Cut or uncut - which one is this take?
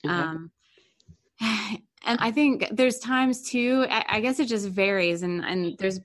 cut